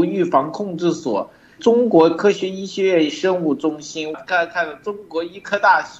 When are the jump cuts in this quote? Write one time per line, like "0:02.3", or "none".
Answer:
0:01.6
0:04.1

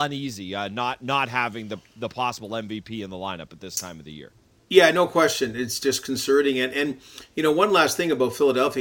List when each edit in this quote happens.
none

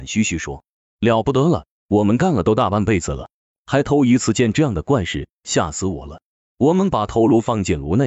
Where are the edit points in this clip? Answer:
none

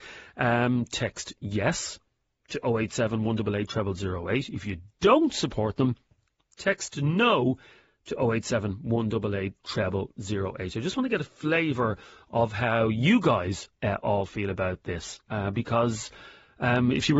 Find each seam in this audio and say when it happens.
none

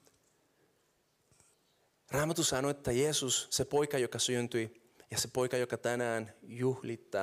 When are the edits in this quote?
none

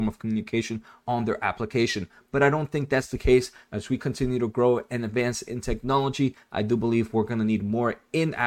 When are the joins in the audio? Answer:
none

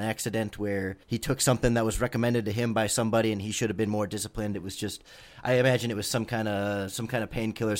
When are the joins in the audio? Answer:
0:01.0
0:04.5

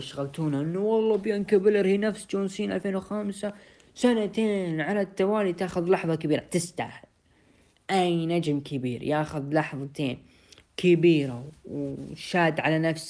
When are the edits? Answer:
none

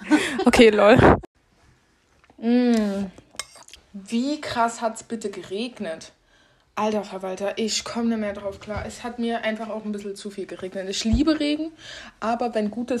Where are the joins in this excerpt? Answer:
0:02.3
0:03.8

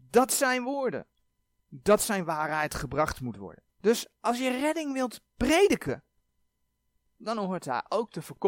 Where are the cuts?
0:03.7

